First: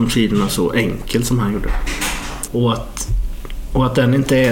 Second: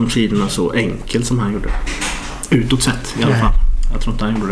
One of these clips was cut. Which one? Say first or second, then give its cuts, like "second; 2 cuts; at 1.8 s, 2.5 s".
first; 1 cut; at 2.5 s